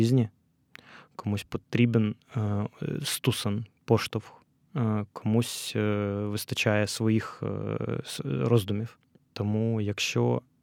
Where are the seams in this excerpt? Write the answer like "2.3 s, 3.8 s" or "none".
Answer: none